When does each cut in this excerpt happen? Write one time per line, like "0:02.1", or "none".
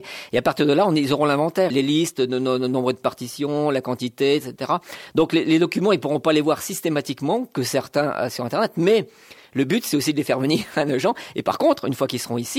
0:01.7